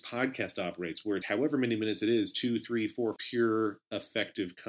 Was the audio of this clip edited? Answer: yes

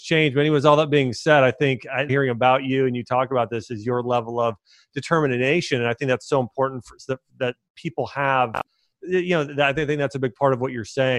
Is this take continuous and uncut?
no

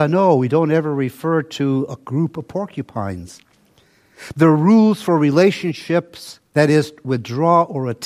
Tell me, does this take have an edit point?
yes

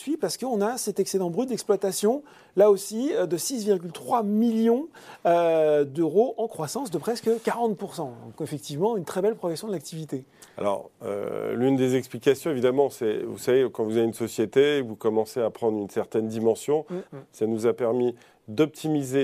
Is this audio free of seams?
no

